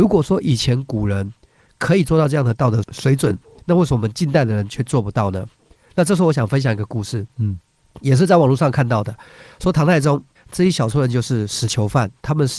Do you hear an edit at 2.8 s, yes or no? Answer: yes